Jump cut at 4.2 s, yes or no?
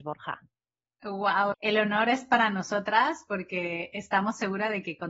no